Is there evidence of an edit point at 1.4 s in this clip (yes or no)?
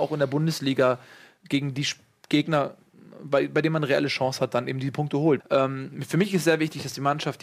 no